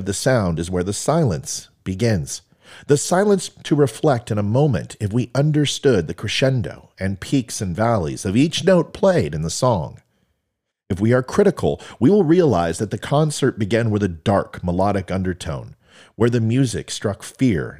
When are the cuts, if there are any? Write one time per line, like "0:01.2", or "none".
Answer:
none